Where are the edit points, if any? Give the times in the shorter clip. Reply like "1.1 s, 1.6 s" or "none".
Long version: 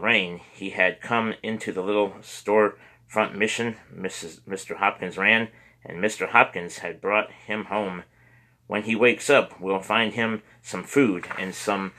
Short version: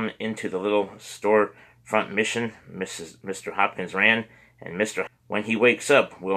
5.1 s